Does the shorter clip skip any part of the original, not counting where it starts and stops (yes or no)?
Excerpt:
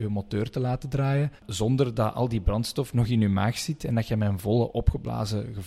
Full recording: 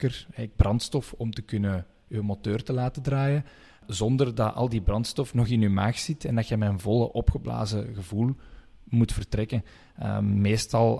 yes